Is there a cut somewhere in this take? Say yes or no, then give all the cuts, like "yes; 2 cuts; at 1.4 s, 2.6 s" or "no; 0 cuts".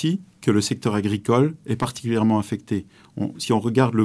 no; 0 cuts